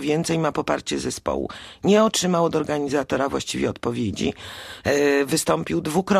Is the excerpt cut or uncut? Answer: cut